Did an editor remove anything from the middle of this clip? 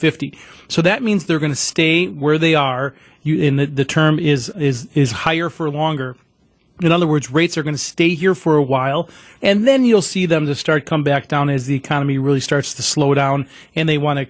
yes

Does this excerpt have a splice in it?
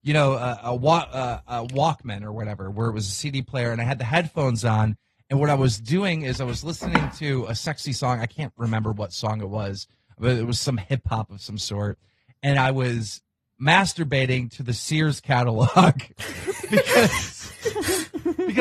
no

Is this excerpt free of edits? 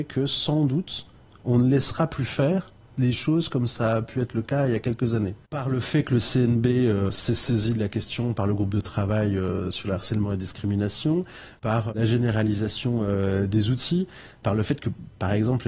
yes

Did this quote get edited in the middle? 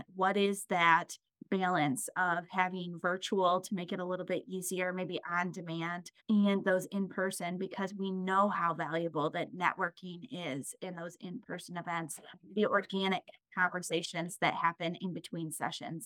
yes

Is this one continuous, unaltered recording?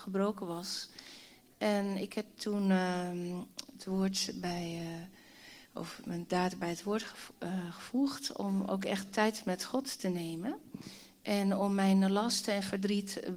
yes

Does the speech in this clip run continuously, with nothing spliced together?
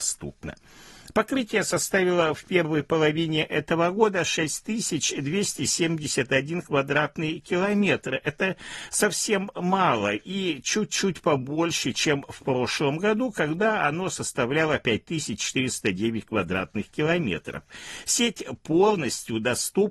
yes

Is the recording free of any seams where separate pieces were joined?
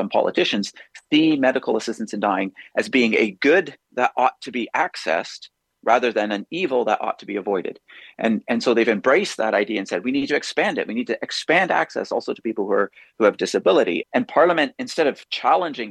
no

